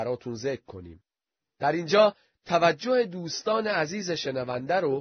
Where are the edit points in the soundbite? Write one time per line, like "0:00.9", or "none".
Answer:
0:01.4

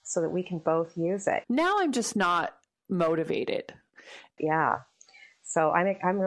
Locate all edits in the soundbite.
0:01.4
0:04.4

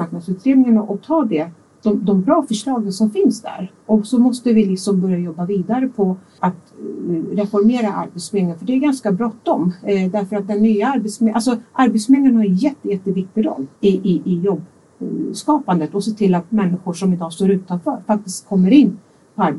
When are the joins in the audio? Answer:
0:06.4
0:13.8

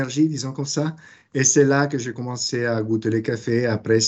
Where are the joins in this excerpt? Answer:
none

